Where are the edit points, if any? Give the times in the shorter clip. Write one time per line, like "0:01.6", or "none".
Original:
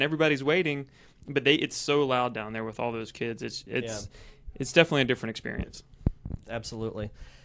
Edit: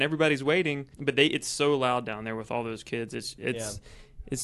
0:00.9